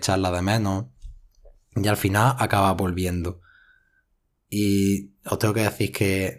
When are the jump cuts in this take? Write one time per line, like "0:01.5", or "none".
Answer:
none